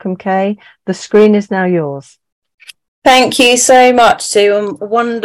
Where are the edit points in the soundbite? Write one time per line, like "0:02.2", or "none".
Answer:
none

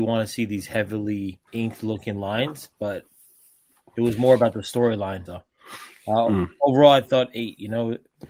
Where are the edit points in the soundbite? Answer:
0:01.5
0:05.3

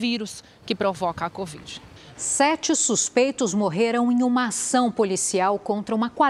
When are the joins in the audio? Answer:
0:02.1

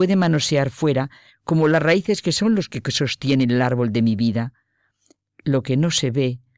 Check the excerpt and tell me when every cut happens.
none

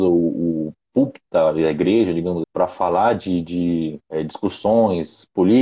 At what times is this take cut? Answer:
0:02.4
0:04.0

